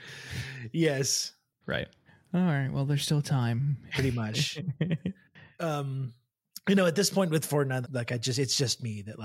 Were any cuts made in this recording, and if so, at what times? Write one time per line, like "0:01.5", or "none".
0:01.6
0:03.9
0:07.8